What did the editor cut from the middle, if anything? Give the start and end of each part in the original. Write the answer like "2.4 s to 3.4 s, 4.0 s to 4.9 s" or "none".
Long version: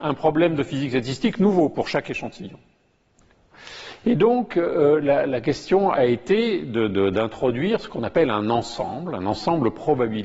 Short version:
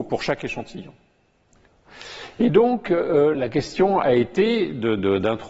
5.0 s to 5.3 s